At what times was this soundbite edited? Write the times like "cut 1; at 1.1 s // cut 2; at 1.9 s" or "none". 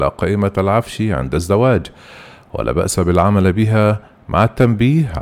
none

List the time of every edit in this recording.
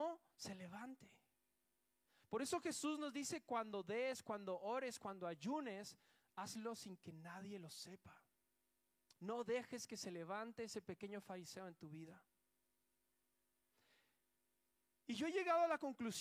none

